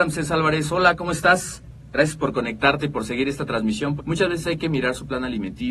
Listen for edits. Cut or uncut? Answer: cut